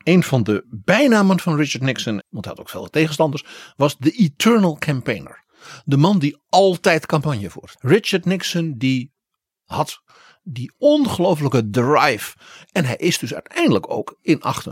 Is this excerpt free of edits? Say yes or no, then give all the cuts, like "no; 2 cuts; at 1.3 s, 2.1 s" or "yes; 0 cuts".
no; 2 cuts; at 2.2 s, 7.8 s